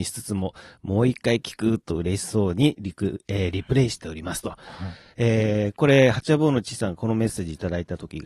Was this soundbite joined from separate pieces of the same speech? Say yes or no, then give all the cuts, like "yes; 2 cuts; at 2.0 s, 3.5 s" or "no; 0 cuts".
no; 0 cuts